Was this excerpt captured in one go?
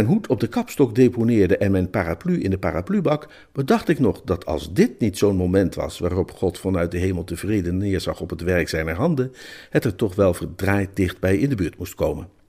yes; 0 cuts

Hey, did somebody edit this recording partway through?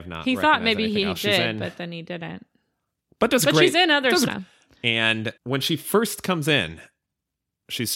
yes; 2 cuts; at 4.3 s, 5.4 s

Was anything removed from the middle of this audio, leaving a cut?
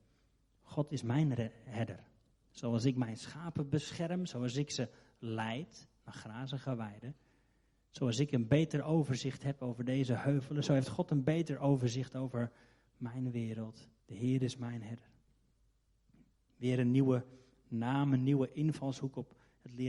yes; 1 cut; at 14.0 s

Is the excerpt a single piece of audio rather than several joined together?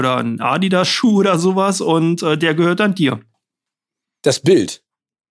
yes; 0 cuts

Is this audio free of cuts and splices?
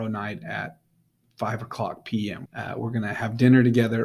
no; 1 cut; at 2.5 s

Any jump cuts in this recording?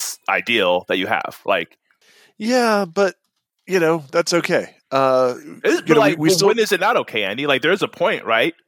no; 0 cuts

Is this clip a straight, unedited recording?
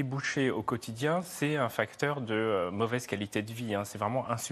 yes; 0 cuts

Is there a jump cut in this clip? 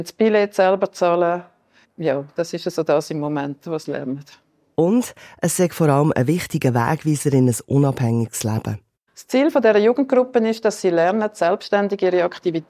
no; 0 cuts

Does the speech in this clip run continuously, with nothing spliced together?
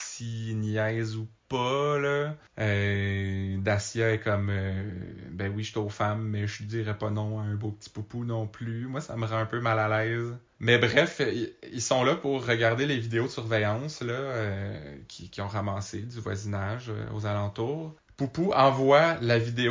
no; 1 cut; at 2.5 s

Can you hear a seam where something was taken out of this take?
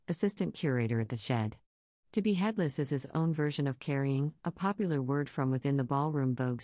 no; 0 cuts

